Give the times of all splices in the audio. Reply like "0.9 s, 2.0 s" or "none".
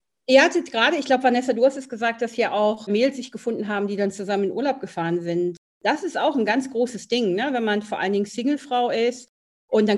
none